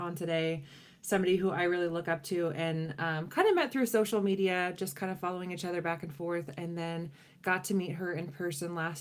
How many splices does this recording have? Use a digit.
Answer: 0